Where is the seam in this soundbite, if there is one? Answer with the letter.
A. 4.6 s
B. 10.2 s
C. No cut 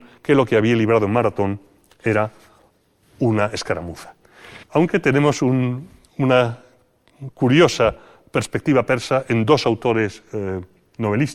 A